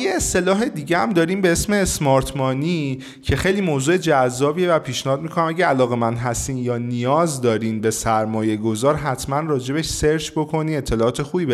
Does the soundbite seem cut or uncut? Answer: uncut